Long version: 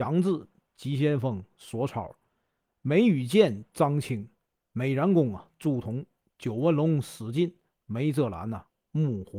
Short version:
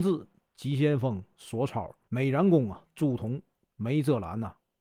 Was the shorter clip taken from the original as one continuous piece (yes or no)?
no